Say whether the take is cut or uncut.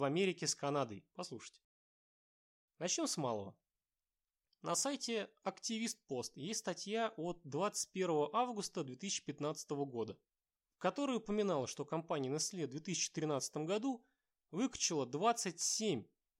cut